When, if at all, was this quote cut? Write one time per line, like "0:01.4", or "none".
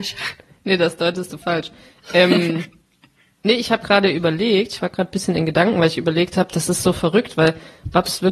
none